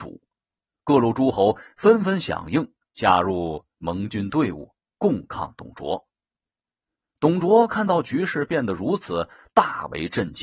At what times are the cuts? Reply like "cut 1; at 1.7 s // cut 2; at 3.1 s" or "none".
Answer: none

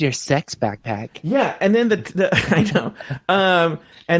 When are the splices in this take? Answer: none

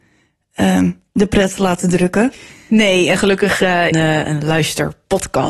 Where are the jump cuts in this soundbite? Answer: cut 1; at 3.9 s

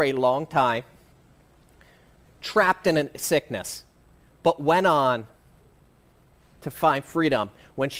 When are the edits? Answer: none

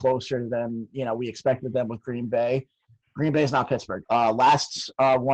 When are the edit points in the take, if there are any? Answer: cut 1; at 4.0 s

